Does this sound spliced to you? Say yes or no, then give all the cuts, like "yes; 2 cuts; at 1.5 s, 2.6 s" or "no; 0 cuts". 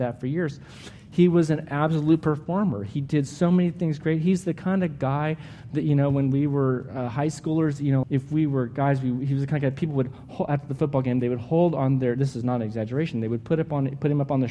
yes; 1 cut; at 8.0 s